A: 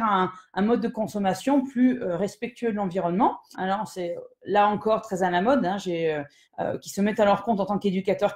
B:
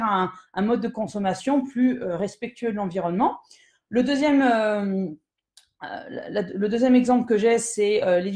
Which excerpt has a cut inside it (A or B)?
A